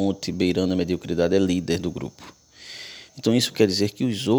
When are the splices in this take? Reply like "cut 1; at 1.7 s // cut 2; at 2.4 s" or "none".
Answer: cut 1; at 3.1 s